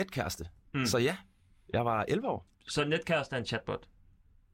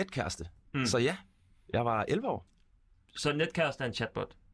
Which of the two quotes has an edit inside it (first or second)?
first